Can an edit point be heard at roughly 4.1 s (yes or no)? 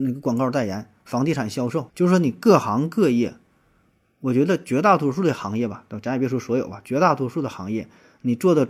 no